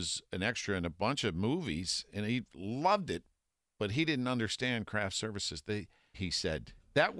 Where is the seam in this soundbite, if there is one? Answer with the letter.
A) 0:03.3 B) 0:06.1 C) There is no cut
B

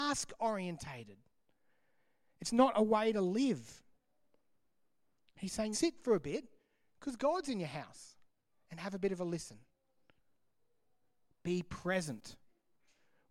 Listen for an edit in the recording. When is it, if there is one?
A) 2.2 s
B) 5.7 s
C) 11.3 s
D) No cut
B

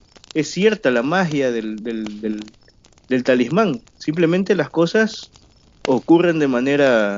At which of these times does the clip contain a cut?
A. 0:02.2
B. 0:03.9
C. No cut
C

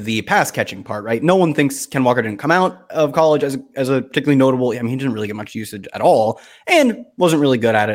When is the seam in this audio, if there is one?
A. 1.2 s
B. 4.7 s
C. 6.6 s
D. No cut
D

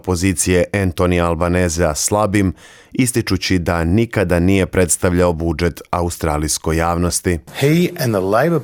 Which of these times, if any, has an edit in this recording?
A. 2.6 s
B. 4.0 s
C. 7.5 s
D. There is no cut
D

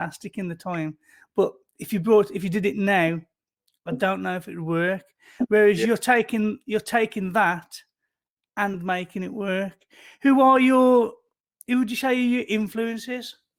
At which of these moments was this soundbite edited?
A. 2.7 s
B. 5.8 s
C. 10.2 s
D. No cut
D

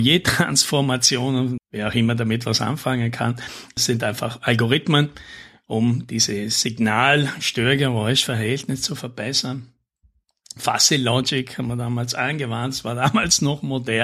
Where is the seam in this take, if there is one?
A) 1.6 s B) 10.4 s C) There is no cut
A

